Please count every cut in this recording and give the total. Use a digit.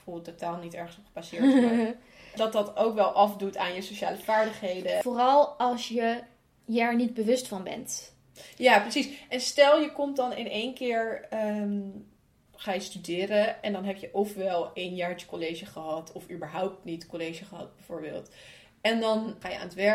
0